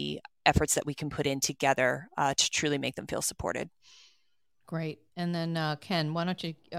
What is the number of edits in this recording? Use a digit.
0